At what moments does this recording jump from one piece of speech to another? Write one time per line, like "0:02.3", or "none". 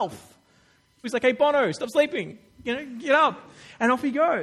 0:01.0